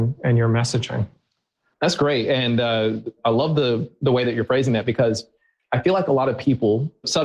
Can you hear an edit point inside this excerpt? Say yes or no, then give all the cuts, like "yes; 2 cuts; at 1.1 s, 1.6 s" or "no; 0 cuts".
no; 0 cuts